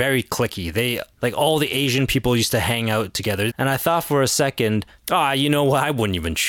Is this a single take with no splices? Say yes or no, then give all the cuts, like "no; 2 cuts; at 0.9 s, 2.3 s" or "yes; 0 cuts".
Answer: no; 1 cut; at 3.5 s